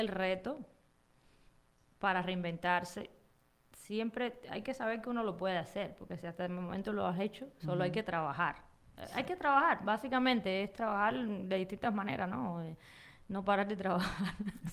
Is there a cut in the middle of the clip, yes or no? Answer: yes